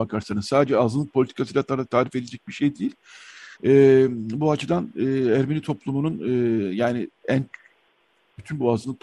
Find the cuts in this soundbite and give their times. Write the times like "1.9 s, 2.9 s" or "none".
3.5 s